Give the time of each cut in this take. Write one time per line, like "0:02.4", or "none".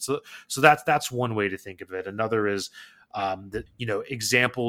0:03.7